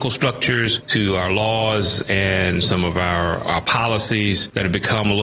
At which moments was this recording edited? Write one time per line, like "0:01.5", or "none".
0:03.4